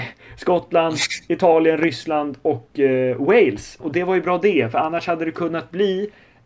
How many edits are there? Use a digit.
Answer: 1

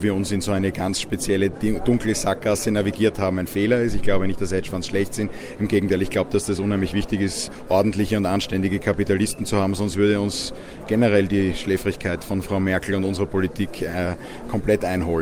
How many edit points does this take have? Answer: 0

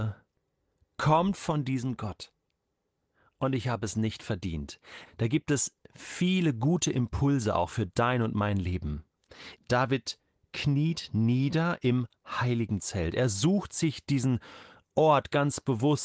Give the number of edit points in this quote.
2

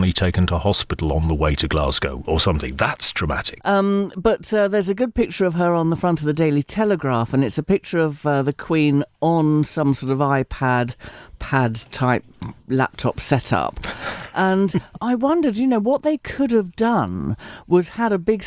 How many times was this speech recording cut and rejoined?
1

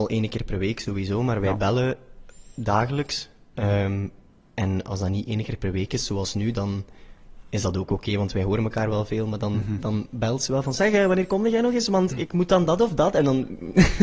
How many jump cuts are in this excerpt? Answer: 1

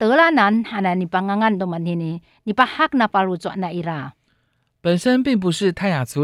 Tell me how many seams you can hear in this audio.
0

